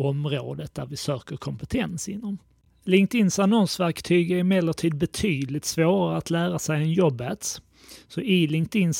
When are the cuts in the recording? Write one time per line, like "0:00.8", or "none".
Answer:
none